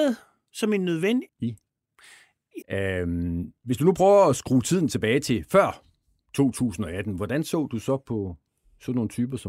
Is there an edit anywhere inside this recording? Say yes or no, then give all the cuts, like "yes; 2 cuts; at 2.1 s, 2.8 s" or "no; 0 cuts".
yes; 2 cuts; at 1.3 s, 2.6 s